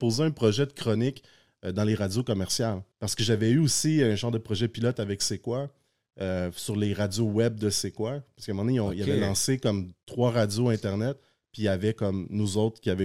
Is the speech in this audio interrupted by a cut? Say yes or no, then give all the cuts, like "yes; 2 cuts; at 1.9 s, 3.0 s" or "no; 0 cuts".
yes; 1 cut; at 2.9 s